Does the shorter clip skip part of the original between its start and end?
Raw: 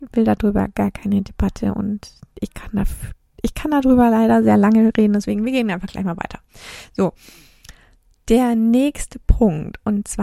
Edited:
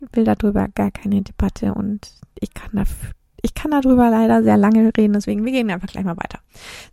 no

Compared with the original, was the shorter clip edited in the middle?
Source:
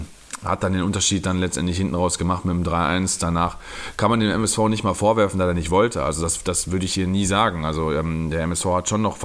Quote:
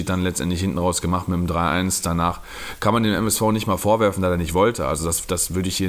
no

